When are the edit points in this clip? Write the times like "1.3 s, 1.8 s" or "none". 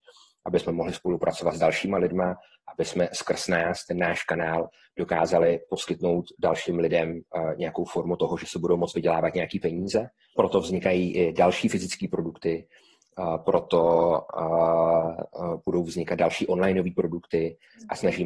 10.3 s

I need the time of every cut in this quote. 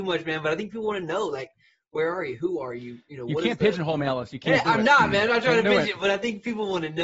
none

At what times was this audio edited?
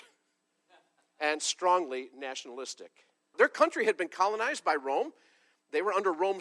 3.3 s

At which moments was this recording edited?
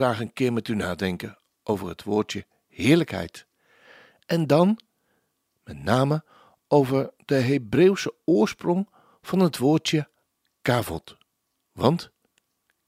none

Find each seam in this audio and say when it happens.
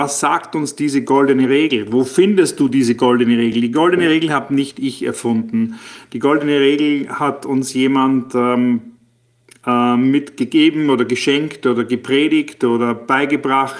none

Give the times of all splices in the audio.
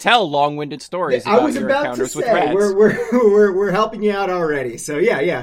none

